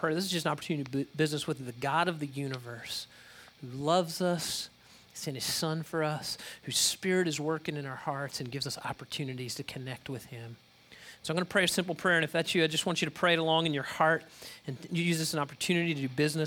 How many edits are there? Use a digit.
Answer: 0